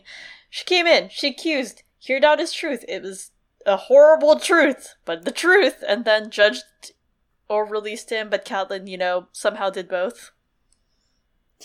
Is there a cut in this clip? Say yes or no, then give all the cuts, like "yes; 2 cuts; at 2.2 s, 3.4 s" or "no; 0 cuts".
no; 0 cuts